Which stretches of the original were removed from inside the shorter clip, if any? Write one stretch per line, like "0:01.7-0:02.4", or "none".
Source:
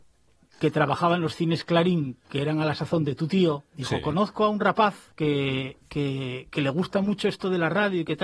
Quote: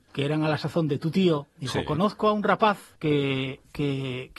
none